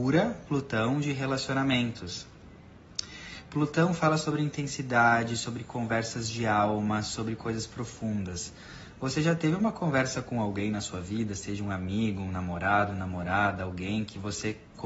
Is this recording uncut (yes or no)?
yes